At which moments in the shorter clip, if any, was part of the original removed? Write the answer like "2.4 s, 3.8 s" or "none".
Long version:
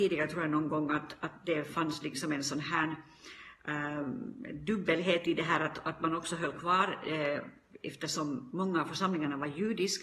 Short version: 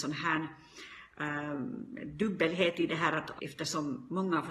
3.4 s